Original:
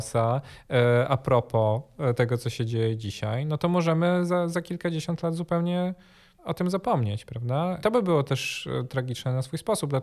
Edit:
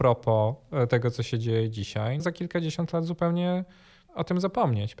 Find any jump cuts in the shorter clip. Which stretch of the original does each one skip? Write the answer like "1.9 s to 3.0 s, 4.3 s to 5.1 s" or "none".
3.5 s to 4.5 s